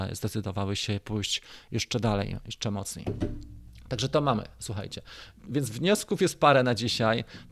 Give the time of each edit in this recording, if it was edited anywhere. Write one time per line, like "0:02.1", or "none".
none